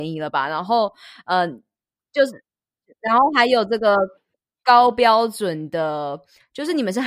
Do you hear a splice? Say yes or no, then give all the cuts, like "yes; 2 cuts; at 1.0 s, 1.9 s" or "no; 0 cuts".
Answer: no; 0 cuts